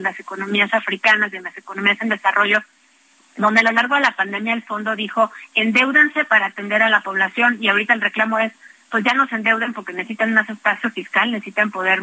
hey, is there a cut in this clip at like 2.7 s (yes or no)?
no